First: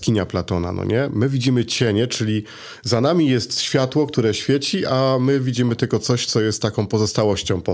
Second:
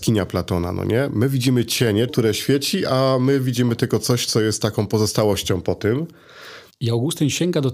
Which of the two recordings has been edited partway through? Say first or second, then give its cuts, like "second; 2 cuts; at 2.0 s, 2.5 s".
second; 2 cuts; at 2.1 s, 6.7 s